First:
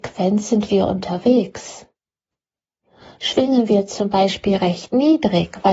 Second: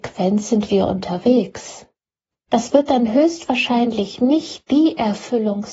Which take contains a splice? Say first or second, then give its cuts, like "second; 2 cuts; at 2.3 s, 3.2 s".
second; 1 cut; at 2.5 s